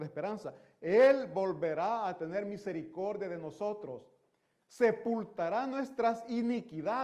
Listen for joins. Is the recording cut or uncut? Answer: uncut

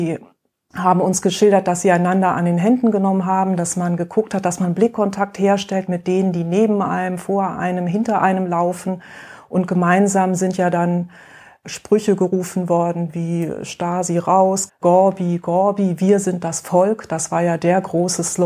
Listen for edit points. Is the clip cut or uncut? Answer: cut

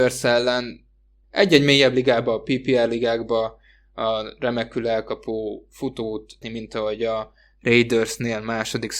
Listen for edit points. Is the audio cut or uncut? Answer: cut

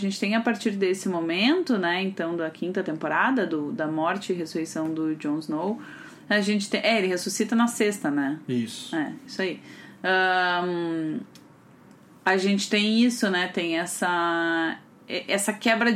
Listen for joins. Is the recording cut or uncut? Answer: uncut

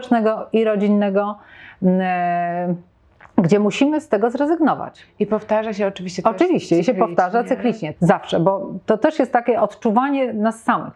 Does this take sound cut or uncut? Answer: cut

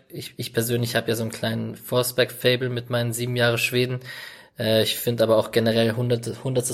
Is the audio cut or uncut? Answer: uncut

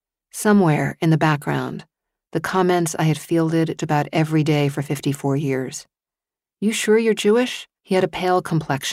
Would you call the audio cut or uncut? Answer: cut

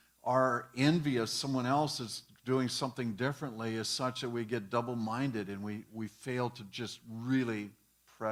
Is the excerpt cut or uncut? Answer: uncut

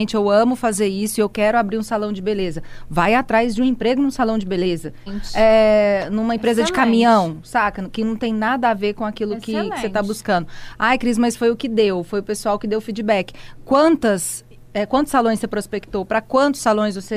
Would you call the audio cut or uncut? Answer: cut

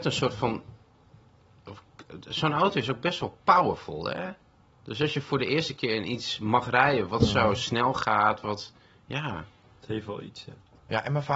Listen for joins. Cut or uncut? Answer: uncut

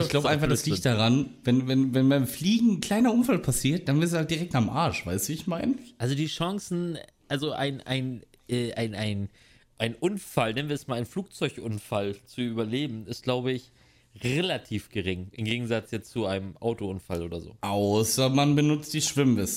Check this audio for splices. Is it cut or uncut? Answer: uncut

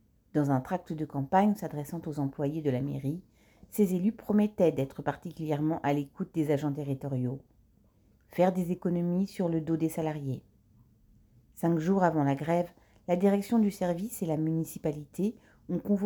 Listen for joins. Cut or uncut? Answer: cut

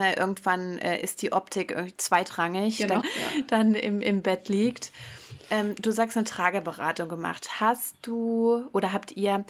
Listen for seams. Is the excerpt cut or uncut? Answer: cut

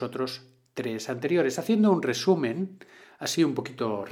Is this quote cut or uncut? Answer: uncut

